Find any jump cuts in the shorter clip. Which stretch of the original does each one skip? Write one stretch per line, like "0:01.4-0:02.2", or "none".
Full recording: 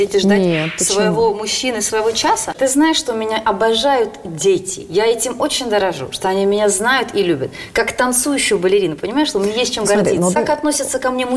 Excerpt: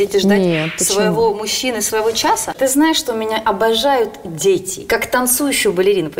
0:04.9-0:07.7